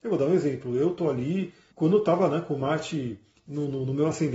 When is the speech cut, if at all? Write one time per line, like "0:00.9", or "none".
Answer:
0:01.7